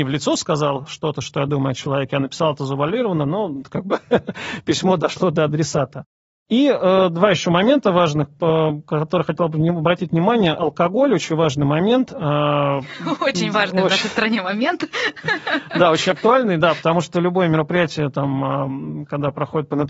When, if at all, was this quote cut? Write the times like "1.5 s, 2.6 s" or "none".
none